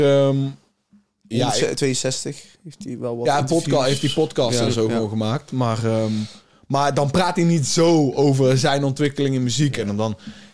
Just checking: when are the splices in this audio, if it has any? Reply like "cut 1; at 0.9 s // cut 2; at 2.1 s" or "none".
none